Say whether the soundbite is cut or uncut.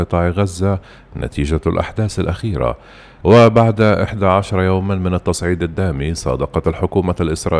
cut